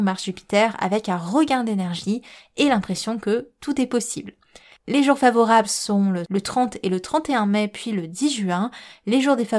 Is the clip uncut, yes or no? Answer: yes